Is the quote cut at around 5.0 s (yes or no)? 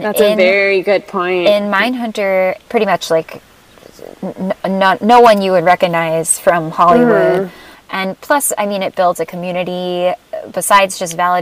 no